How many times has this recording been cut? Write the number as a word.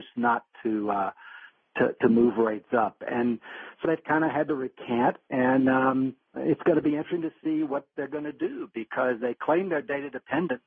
two